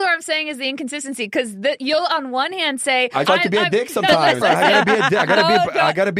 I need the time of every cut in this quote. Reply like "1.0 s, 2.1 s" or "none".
3.2 s, 4.4 s